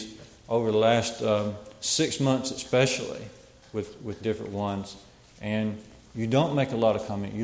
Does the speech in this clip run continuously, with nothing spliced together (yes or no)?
yes